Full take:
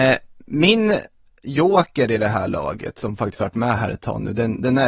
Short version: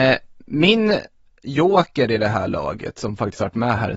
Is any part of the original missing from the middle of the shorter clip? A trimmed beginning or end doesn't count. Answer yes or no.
no